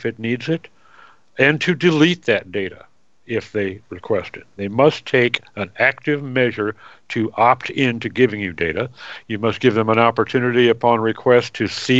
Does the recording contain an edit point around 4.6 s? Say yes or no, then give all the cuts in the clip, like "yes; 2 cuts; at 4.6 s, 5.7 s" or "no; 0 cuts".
yes; 2 cuts; at 4.6 s, 9.2 s